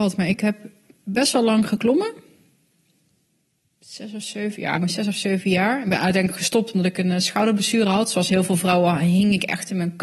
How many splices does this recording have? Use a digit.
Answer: 1